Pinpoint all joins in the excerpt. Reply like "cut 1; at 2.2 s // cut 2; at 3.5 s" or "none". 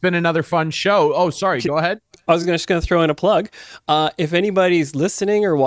none